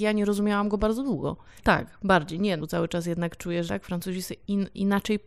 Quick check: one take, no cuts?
no; 3 cuts; at 1.6 s, 2.6 s, 3.7 s

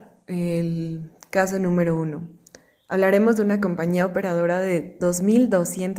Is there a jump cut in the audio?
no; 0 cuts

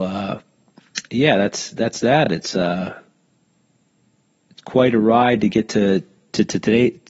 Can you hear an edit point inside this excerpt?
no; 0 cuts

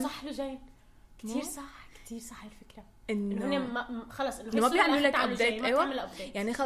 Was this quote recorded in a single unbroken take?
yes; 0 cuts

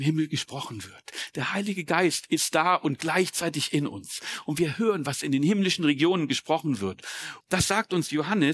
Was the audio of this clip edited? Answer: yes; 1 cut; at 7.4 s

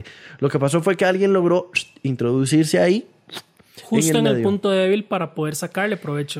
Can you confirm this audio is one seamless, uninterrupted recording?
yes; 0 cuts

